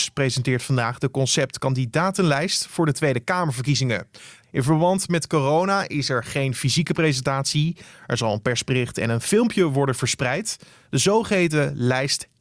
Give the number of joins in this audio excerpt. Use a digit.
2